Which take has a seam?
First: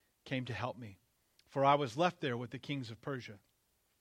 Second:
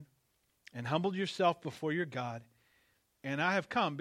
second; 1 cut; at 3.1 s

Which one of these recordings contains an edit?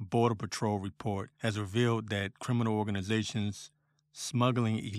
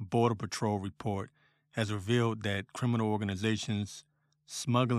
first; 1 cut; at 1.3 s

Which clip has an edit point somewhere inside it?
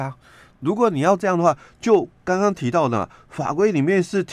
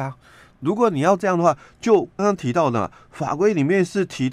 second; 1 cut; at 2.2 s

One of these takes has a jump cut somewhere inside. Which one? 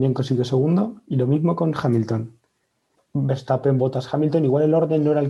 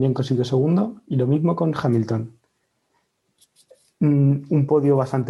first; 1 cut; at 2.9 s

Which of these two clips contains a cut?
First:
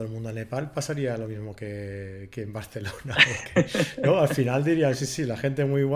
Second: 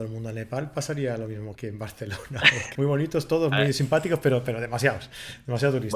second; 2 cuts; at 1.6 s, 2.7 s

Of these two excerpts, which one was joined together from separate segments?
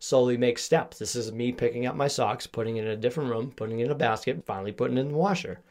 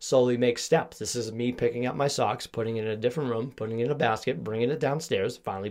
first; 1 cut; at 4.4 s

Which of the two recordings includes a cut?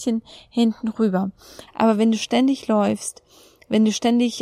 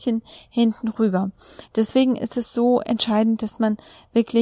first; 1 cut; at 1.7 s

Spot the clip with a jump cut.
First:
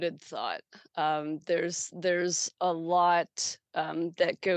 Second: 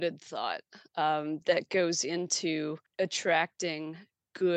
second; 2 cuts; at 1.4 s, 2.9 s

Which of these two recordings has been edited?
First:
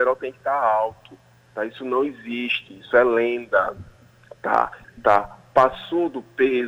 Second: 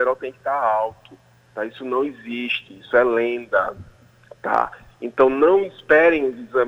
first; 1 cut; at 4.8 s

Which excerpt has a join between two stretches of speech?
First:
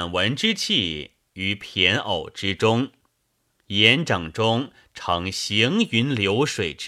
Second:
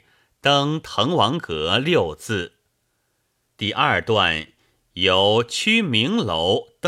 second; 1 cut; at 3.5 s

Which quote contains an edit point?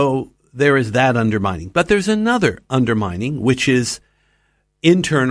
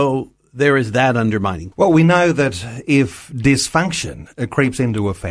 second; 1 cut; at 1.7 s

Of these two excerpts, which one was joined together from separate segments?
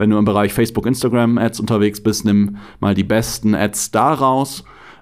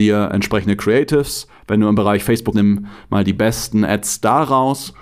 second; 1 cut; at 2.5 s

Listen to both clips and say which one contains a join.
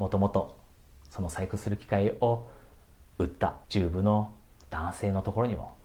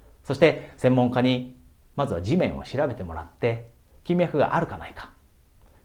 first; 1 cut; at 3.6 s

